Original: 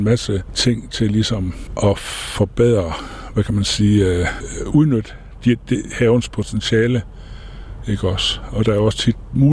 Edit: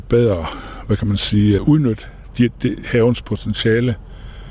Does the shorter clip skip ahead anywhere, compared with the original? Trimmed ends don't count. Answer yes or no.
yes